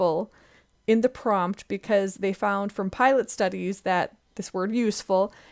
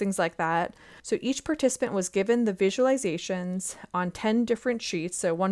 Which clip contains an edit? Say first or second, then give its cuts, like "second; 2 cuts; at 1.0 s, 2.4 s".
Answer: second; 1 cut; at 1.0 s